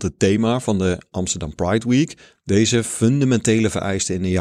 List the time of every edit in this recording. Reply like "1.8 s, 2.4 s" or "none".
2.4 s